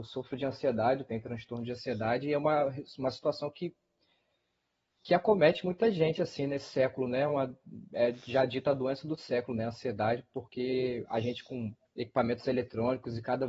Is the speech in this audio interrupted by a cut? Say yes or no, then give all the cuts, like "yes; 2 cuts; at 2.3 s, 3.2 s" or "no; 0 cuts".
no; 0 cuts